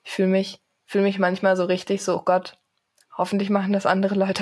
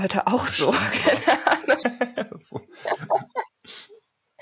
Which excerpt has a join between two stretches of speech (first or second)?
second